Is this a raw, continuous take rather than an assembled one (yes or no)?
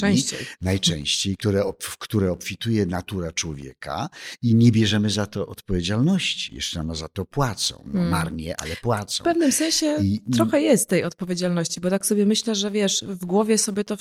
no